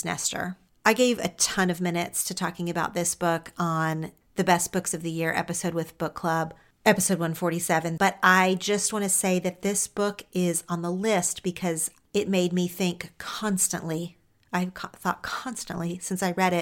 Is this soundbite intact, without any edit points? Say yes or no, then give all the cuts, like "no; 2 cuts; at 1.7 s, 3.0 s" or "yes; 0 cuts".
no; 1 cut; at 8.0 s